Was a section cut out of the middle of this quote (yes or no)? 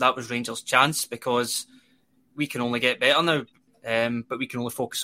yes